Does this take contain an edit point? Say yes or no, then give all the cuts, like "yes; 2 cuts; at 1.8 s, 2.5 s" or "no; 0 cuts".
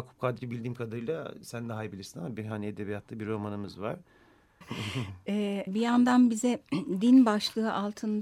yes; 2 cuts; at 4.6 s, 5.7 s